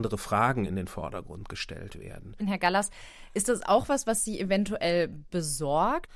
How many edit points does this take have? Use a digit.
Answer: 1